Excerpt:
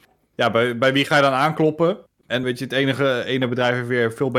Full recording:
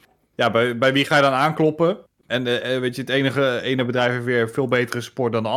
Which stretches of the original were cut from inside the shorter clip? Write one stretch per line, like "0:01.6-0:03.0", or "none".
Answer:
0:02.4-0:02.8

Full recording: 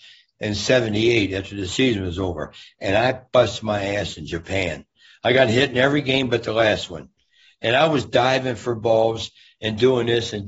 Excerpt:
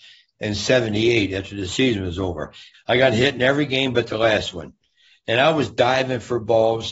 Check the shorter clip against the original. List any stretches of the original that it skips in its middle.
0:02.7-0:05.1

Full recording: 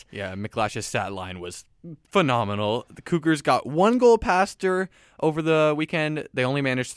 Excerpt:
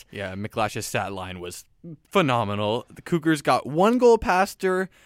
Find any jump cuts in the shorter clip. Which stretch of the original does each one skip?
none

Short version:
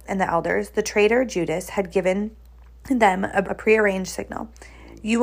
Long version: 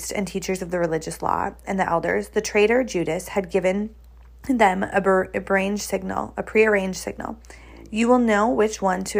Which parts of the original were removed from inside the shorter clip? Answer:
0:05.0-0:06.3

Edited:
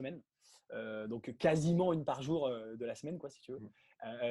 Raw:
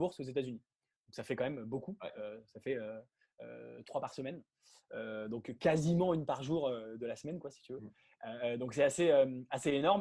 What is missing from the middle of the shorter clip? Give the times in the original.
none

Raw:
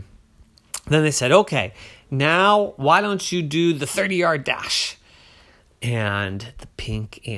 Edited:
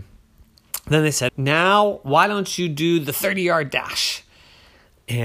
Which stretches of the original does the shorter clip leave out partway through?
0:01.3-0:02.0

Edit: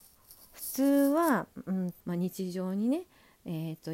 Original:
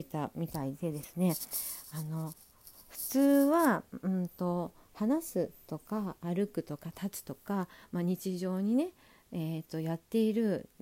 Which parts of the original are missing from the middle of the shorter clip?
0:04.4-0:07.9

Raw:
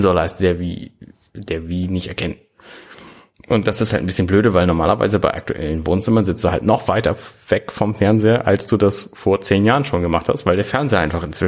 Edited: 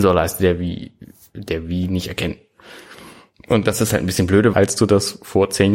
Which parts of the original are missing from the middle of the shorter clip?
0:04.5-0:08.4

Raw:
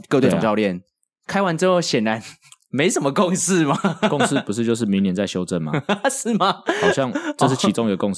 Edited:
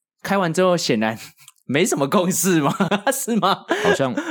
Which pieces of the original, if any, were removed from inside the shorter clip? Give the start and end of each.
0:03.9-0:05.9

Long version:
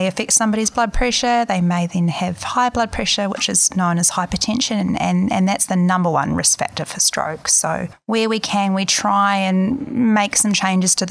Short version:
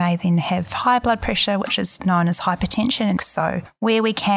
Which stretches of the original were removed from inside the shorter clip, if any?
0:04.9-0:07.4

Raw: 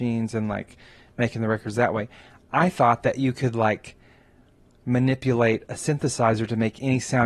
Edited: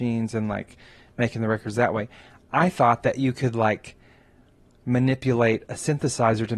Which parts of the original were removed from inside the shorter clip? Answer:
none

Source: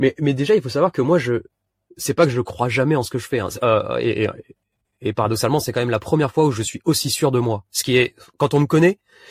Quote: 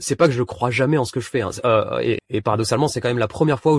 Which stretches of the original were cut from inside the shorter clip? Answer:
0:04.2-0:04.9

